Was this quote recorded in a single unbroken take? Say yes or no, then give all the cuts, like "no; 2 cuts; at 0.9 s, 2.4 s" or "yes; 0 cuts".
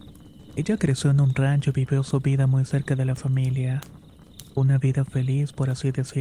yes; 0 cuts